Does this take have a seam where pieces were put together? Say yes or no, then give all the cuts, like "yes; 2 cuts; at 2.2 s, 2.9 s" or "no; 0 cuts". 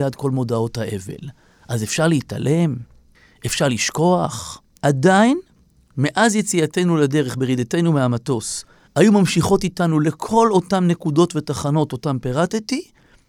yes; 2 cuts; at 4.8 s, 8.9 s